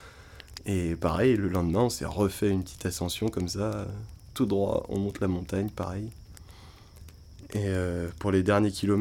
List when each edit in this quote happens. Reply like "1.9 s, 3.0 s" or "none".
7.5 s